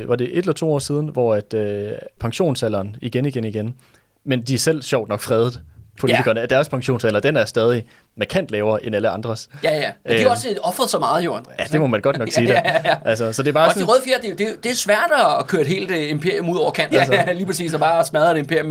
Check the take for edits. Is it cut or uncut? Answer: cut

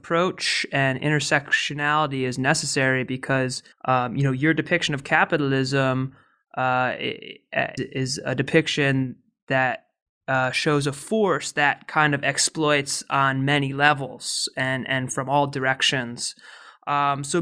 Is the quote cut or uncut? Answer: cut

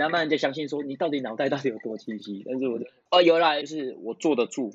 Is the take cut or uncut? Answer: cut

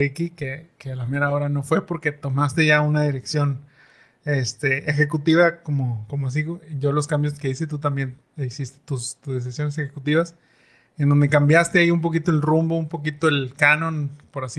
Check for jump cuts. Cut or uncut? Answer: uncut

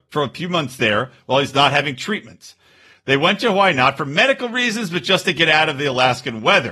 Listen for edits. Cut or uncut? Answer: uncut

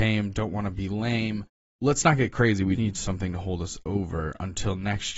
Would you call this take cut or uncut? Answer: cut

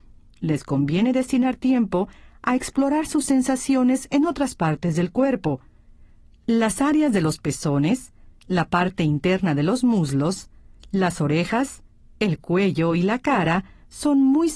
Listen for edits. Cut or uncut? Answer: uncut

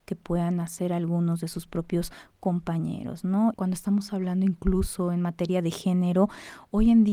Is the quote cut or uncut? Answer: cut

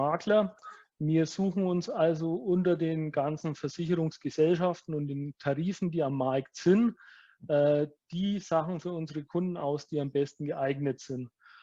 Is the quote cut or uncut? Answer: uncut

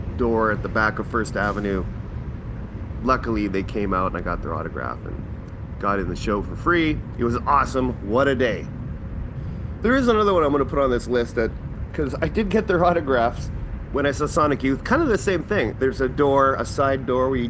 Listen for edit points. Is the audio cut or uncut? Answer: cut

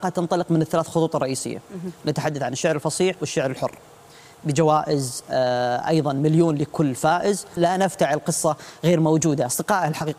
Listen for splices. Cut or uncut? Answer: cut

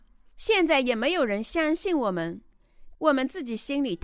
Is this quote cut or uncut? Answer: cut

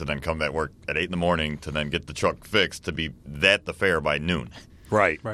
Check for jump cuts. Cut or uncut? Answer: cut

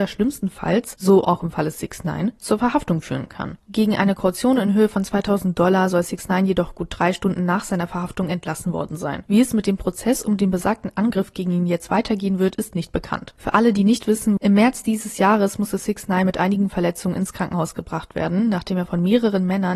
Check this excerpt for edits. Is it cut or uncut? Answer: cut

